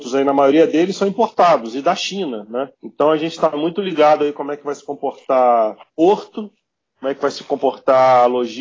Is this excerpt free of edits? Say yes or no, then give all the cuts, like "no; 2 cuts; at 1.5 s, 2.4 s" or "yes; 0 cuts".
no; 2 cuts; at 2.7 s, 5.8 s